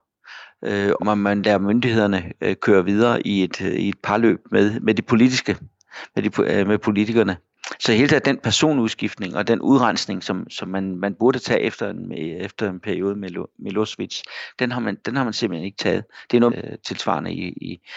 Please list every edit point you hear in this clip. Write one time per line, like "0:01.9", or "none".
0:01.0
0:16.5